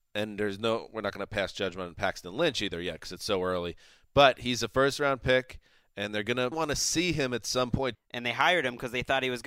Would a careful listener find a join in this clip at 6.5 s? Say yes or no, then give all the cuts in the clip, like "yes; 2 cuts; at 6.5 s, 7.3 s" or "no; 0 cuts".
yes; 2 cuts; at 6.5 s, 7.9 s